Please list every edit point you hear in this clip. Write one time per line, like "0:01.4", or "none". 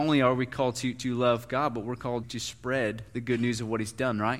0:02.2

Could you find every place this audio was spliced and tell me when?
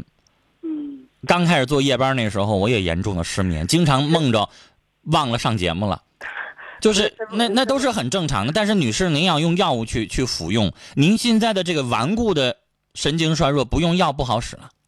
none

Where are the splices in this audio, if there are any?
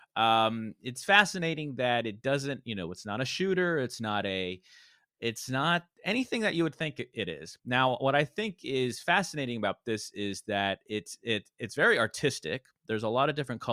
0:05.9
0:07.6

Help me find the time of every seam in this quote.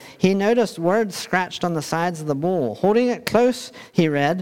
none

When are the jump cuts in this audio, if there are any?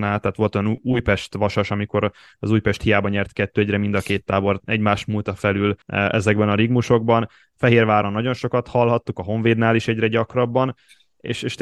0:05.8

